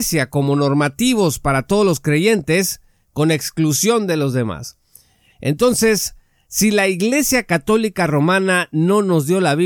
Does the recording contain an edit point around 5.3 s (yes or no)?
yes